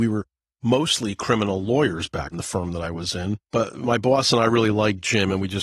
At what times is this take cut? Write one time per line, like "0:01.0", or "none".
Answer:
0:02.3
0:03.4